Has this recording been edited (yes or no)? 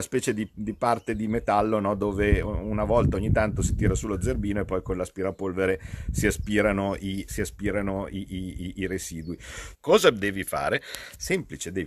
yes